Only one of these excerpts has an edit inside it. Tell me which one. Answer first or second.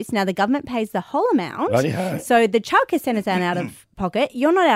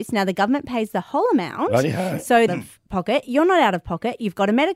second